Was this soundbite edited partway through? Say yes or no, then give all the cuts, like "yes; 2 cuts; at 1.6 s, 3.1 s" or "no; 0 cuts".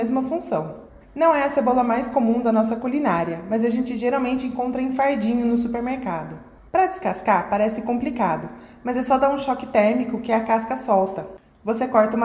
yes; 2 cuts; at 1.0 s, 6.7 s